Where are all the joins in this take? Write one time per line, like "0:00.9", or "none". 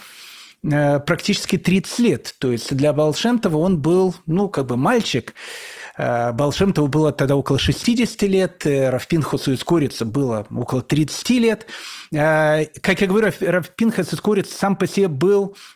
none